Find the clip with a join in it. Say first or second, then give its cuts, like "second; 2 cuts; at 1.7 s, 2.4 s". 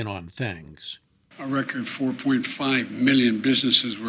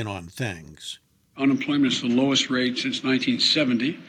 first; 1 cut; at 1.3 s